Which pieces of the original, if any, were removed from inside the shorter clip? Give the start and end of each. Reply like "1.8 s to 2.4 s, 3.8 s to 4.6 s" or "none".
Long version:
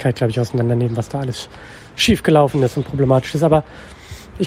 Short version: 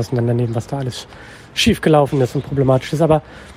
none